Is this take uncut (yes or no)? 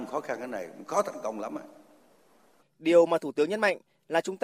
no